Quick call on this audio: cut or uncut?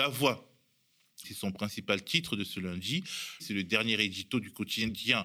cut